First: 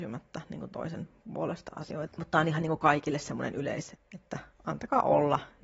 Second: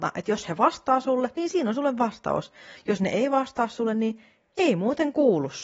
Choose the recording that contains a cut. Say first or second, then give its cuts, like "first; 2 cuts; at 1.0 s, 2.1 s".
first; 2 cuts; at 2.1 s, 3.9 s